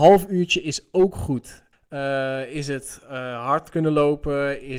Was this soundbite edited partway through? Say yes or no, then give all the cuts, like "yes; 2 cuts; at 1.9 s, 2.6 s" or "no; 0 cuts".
yes; 1 cut; at 1.7 s